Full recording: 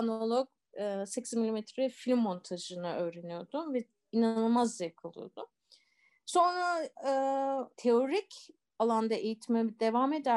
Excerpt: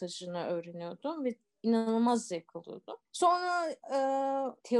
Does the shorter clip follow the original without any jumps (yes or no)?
no